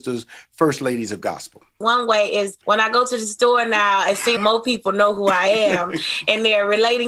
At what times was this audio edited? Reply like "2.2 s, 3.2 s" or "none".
1.8 s, 4.4 s